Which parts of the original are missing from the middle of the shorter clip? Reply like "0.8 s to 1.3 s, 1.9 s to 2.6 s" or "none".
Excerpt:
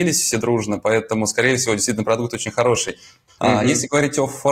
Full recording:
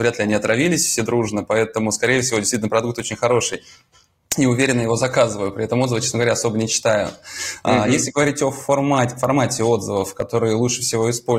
4.0 s to 7.6 s